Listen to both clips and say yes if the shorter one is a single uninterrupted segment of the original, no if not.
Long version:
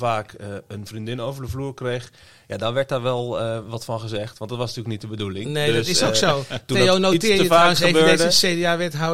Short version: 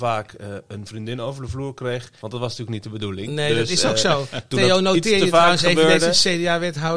no